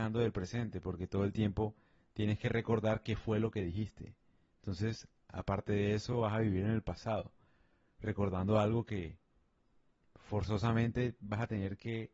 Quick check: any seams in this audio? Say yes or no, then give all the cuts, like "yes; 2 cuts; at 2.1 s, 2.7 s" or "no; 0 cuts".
no; 0 cuts